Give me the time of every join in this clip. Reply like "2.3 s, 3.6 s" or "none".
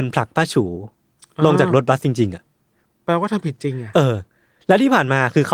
none

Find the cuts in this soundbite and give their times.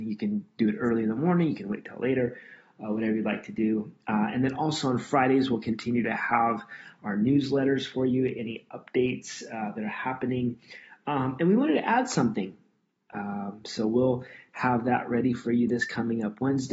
13.1 s

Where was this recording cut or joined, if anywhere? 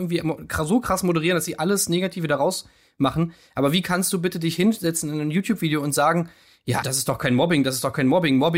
6.8 s

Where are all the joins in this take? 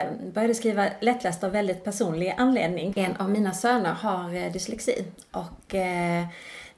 2.9 s

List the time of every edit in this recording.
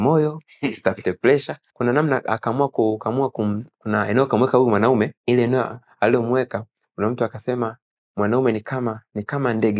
1.7 s, 5.2 s

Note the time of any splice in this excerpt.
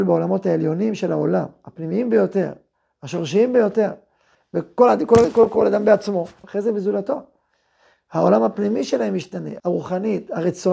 4.3 s, 6.4 s, 9.6 s

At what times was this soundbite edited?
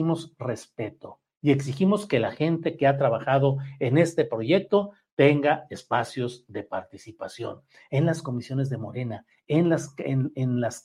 none

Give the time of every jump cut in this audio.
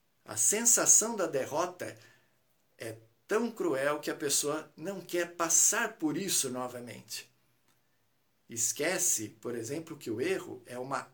none

